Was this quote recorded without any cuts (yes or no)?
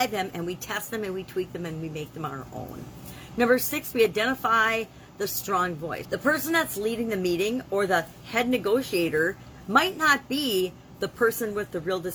no